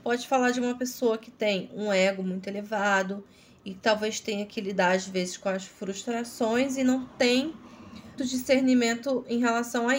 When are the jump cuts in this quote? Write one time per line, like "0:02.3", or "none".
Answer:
0:08.2